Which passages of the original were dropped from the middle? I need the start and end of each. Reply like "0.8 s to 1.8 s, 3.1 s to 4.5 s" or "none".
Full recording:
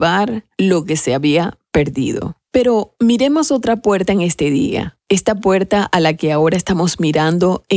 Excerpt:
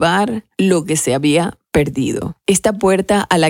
2.4 s to 5.0 s